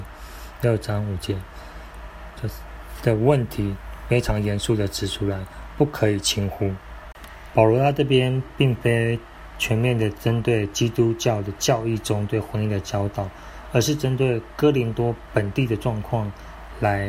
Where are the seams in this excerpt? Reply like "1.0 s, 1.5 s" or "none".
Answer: 2.4 s, 7.5 s